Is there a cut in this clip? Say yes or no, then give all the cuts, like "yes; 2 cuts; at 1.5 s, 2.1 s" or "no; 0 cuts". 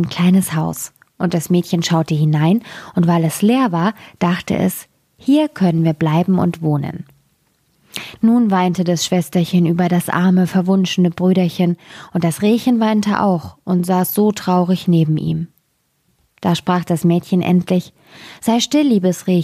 yes; 1 cut; at 8.2 s